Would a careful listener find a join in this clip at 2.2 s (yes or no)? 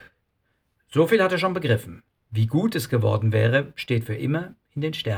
yes